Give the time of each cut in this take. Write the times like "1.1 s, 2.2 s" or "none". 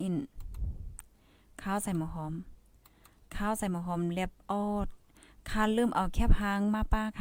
4.4 s

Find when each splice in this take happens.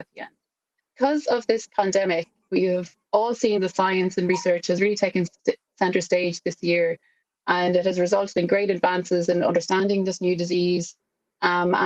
none

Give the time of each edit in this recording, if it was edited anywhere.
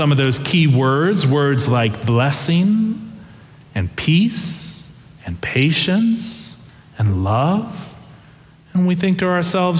none

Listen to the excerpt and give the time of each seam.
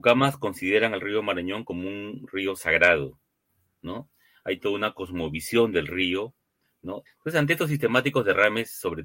7.1 s

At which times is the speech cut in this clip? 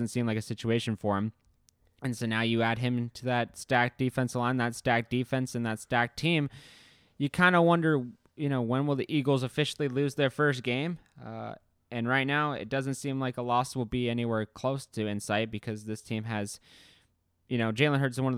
none

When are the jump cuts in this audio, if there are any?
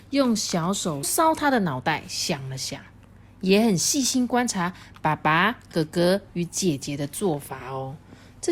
1.0 s

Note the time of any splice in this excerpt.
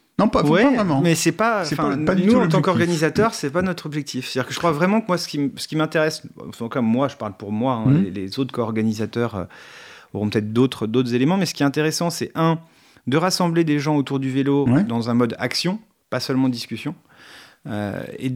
none

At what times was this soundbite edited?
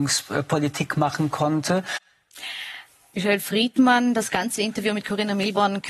none

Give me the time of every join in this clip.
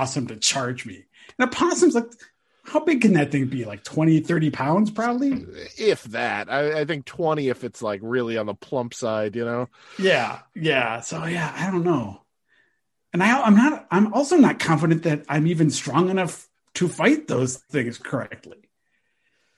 none

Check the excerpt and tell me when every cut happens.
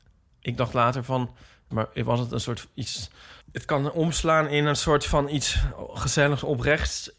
1.7 s, 3.4 s

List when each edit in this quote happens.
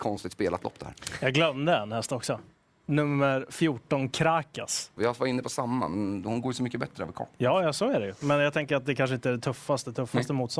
5.0 s

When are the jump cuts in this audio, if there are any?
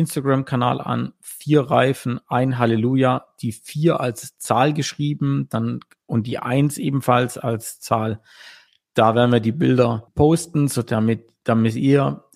none

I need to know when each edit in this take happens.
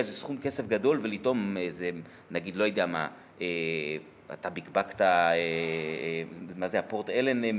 none

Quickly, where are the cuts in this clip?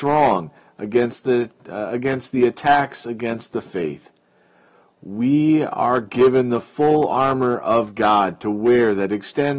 none

